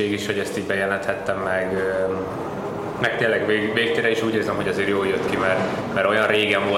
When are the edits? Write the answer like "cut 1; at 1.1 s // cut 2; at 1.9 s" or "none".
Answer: none

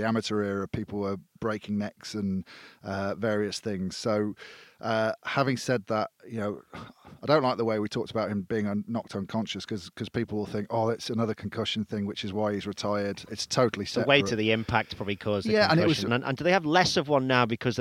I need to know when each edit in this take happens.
cut 1; at 13.3 s // cut 2; at 16.1 s

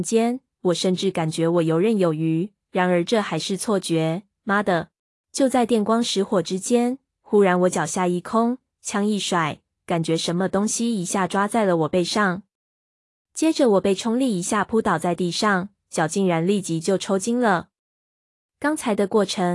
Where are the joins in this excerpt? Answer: cut 1; at 5.1 s // cut 2; at 9.7 s

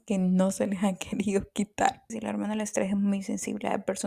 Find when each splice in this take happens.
cut 1; at 2.1 s

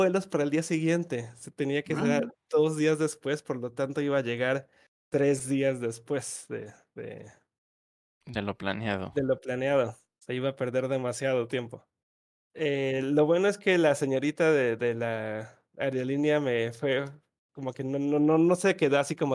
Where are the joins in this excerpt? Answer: cut 1; at 12.4 s

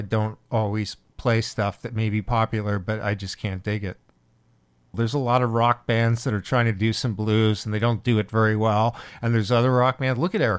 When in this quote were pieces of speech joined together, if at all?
cut 1; at 4.9 s

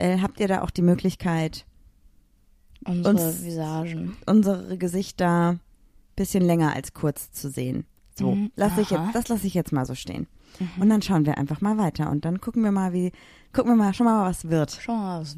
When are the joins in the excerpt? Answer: none

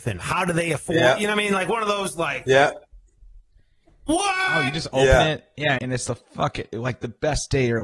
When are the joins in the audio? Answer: cut 1; at 5.8 s

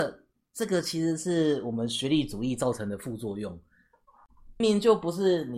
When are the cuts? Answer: cut 1; at 4.6 s

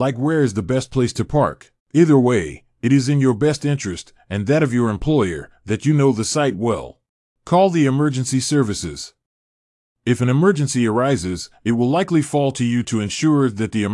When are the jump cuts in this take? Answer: cut 1; at 1.8 s // cut 2; at 7.3 s

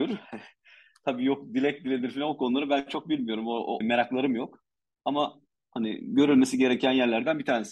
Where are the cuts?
cut 1; at 3.8 s

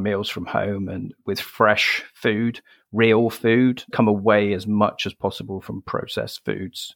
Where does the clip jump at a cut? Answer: cut 1; at 3.9 s

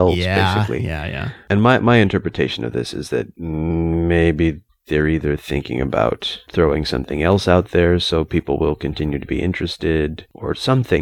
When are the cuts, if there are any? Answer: none

